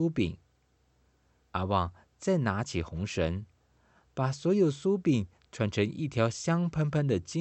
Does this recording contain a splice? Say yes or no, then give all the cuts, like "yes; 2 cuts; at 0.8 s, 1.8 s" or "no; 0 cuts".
yes; 1 cut; at 1.4 s